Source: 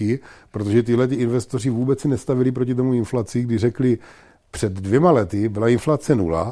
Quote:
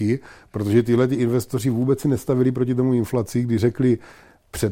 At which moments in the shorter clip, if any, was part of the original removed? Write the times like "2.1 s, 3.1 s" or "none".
none